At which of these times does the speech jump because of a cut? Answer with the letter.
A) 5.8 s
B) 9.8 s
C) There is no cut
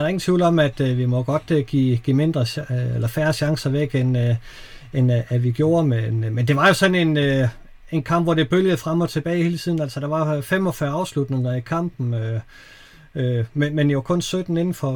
C